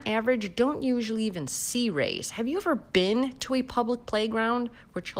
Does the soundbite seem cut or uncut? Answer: uncut